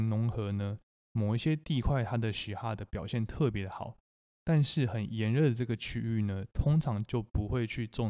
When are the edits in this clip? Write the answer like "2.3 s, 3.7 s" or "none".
none